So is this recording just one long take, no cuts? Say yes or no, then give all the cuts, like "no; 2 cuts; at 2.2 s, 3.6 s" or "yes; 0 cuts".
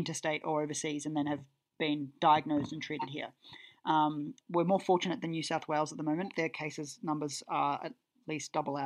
no; 1 cut; at 4.4 s